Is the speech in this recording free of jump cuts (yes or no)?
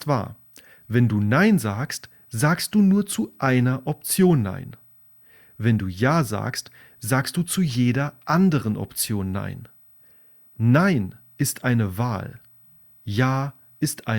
yes